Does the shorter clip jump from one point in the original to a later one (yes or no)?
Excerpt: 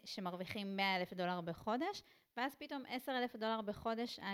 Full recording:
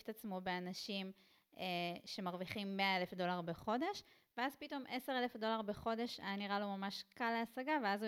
no